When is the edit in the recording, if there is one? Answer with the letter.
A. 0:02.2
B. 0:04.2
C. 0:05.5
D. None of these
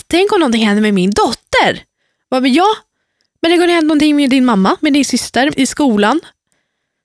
C